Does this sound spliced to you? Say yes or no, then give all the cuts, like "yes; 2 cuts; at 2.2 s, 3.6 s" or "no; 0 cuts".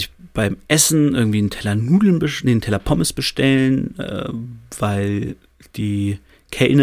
no; 0 cuts